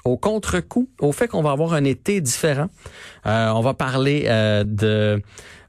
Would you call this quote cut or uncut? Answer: uncut